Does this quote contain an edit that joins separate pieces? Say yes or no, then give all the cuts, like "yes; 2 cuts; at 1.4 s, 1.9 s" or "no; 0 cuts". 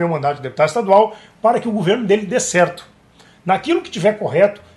no; 0 cuts